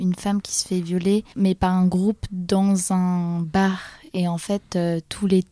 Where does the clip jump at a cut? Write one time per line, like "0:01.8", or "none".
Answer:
none